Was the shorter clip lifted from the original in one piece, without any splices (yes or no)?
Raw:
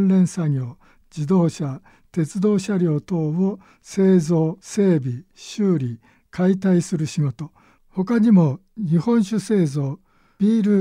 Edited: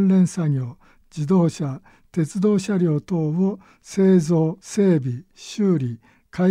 yes